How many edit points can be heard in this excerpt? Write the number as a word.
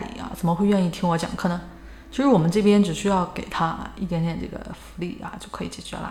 zero